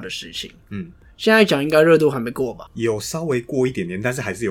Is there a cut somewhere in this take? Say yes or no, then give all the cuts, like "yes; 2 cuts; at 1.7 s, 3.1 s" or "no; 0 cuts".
no; 0 cuts